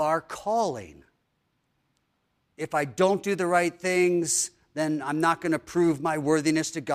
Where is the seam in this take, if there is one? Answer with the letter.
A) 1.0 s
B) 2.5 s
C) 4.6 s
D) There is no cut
B